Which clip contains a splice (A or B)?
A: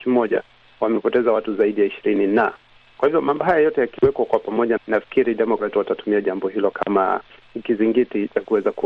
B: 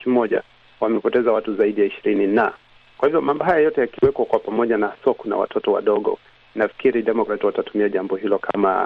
A